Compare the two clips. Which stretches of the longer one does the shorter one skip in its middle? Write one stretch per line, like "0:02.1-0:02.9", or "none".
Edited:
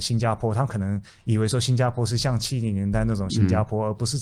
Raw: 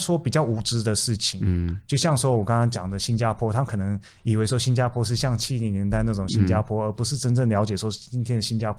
none